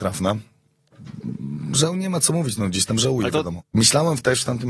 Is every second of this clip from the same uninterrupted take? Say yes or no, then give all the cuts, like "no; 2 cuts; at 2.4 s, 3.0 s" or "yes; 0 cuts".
no; 1 cut; at 3.6 s